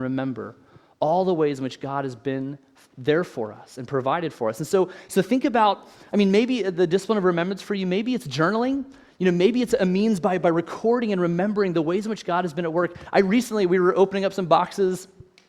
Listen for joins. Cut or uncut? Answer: uncut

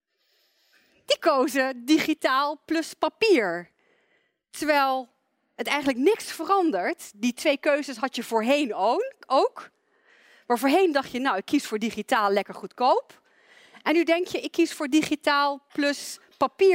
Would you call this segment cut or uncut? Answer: uncut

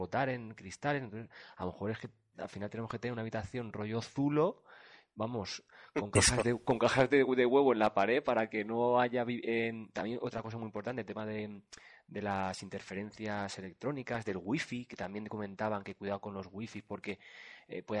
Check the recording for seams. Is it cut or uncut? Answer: uncut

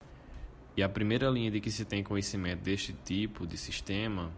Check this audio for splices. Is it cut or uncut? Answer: uncut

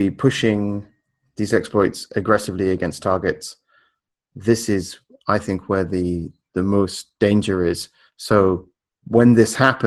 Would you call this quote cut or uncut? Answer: uncut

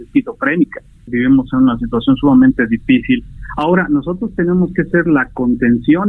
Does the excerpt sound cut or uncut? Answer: cut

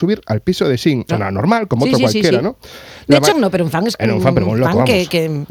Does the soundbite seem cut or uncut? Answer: cut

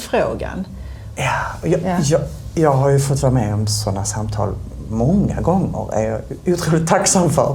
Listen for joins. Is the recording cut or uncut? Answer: cut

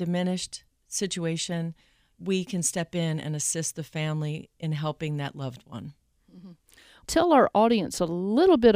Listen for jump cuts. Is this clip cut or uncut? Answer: cut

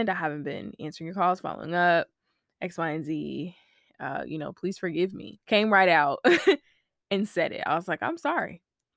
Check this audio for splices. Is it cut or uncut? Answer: cut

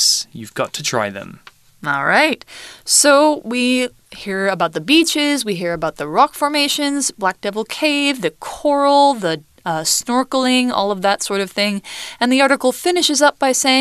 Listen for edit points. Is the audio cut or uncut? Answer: uncut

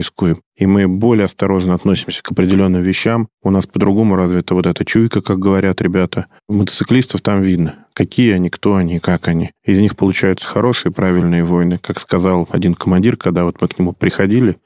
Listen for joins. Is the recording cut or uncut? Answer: uncut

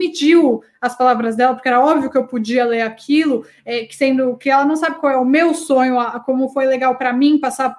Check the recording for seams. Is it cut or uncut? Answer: uncut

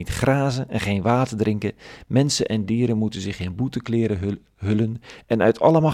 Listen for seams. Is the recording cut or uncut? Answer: uncut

